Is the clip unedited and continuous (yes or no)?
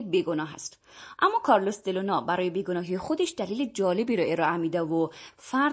no